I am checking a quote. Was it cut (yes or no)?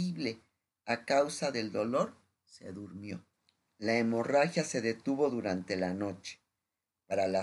no